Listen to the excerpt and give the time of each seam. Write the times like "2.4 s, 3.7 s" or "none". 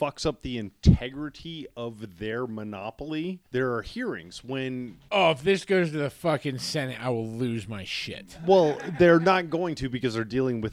3.5 s, 5.1 s

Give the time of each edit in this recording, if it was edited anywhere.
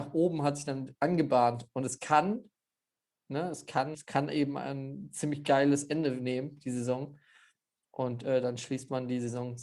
3.9 s

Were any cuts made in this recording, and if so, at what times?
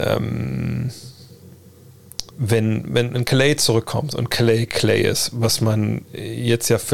2.3 s

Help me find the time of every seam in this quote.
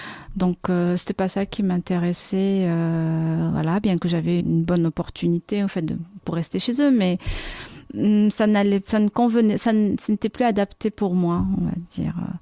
4.4 s

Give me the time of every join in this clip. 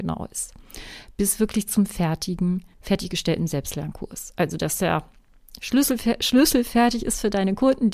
2.7 s

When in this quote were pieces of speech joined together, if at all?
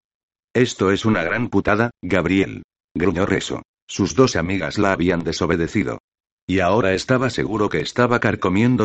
3.8 s

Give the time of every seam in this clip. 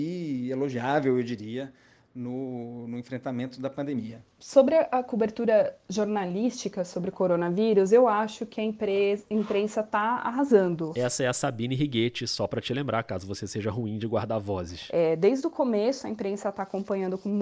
none

